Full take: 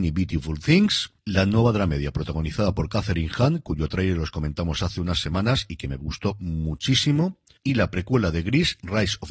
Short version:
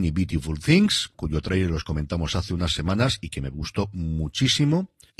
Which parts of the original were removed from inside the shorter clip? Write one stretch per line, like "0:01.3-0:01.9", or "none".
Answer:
0:01.1-0:03.6